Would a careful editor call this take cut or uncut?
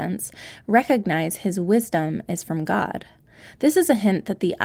uncut